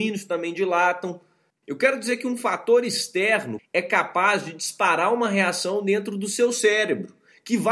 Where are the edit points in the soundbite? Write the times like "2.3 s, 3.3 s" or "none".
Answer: 1.6 s, 3.6 s